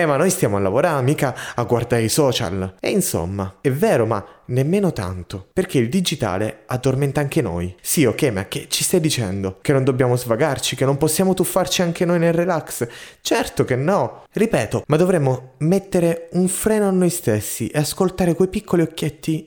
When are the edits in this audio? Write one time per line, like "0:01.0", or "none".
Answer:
0:14.8